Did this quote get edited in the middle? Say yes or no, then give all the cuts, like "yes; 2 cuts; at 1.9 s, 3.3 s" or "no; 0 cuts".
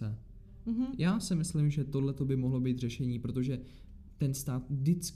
no; 0 cuts